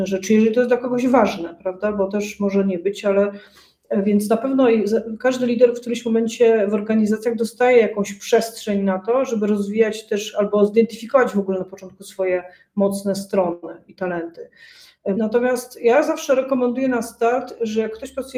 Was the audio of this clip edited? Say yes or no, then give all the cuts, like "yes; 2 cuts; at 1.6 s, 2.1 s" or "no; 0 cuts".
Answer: yes; 1 cut; at 15.2 s